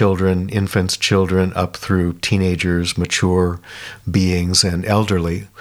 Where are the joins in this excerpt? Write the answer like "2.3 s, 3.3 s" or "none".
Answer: none